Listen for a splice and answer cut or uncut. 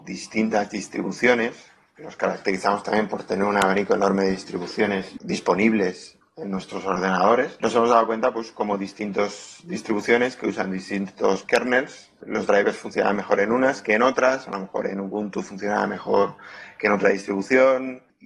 uncut